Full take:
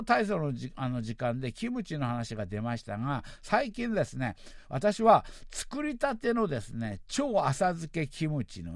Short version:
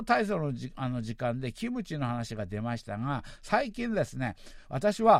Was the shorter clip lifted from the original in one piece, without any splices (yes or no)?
yes